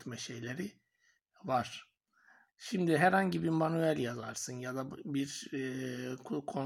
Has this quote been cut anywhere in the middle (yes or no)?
yes